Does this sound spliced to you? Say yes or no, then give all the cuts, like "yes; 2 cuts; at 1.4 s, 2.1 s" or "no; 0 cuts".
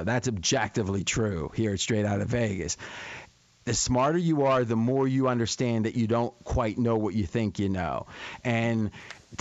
no; 0 cuts